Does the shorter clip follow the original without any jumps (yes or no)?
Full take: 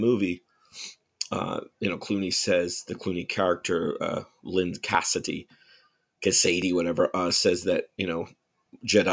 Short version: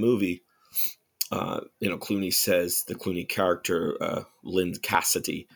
yes